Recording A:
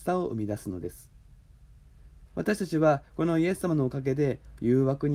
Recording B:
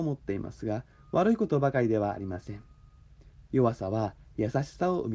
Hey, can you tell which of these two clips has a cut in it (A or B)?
A